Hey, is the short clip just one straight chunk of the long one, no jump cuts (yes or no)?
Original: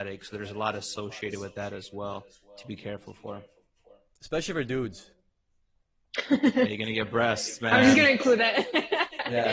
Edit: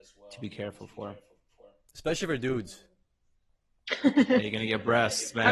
yes